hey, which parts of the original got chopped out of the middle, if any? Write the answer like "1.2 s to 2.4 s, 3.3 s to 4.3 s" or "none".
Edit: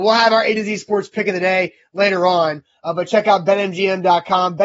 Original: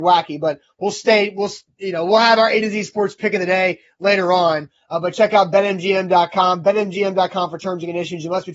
none

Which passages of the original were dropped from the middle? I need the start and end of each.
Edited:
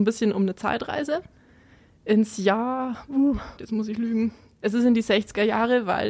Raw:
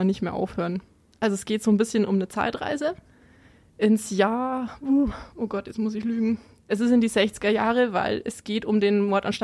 5.3 s to 5.6 s

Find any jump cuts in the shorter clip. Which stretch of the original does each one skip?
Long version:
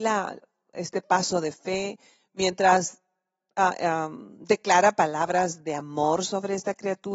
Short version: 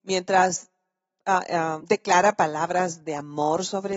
4.1 s to 4.4 s

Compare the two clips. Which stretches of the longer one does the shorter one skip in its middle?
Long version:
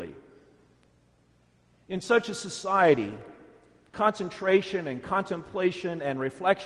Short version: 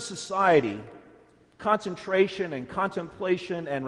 none

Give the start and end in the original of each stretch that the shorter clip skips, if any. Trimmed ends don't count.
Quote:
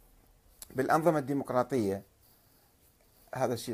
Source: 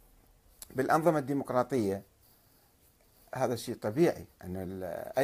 none

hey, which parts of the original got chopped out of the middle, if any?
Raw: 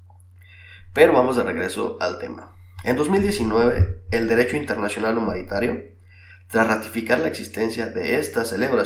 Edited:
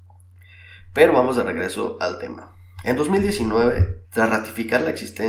4.0 s to 6.4 s

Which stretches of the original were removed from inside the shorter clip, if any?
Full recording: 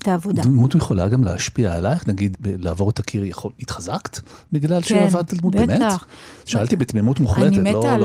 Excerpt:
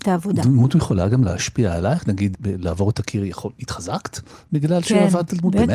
none

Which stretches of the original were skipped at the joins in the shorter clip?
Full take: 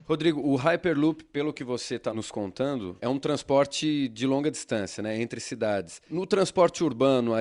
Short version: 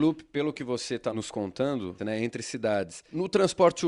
3.0 s to 5.0 s

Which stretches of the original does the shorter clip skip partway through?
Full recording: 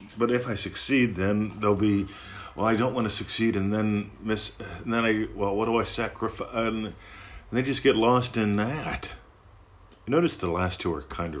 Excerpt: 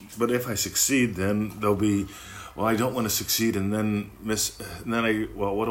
none

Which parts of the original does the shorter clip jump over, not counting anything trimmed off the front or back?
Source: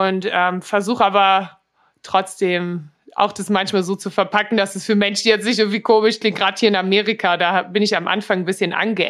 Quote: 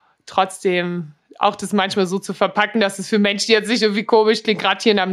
none

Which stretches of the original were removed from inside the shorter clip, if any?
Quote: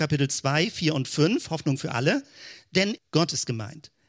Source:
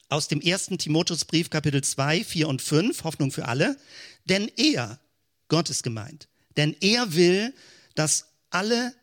4.5 s to 5.3 s

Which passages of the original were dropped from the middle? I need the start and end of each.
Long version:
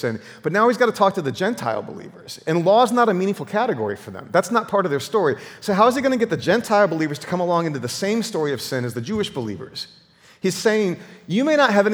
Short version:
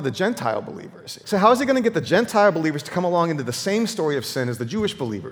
2.4 s to 5.6 s

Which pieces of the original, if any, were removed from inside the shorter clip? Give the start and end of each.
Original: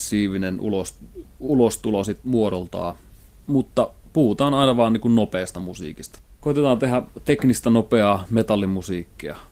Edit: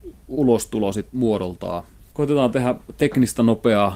3.2 s to 6.4 s

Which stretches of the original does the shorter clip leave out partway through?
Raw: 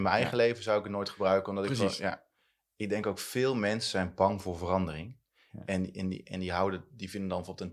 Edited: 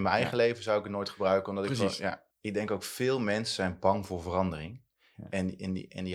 2.3 s to 2.7 s

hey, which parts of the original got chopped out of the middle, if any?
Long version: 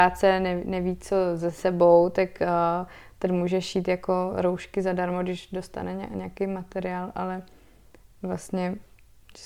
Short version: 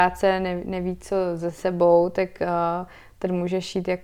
none

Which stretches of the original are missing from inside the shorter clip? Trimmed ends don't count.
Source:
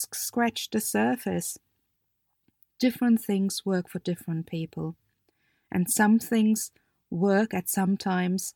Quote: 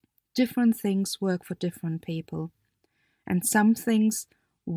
none

